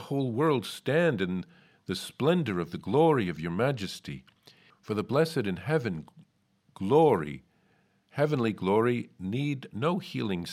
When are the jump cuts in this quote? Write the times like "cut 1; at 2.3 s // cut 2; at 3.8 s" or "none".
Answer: cut 1; at 4.7 s